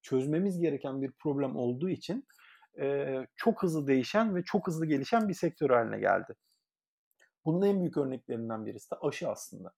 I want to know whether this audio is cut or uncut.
uncut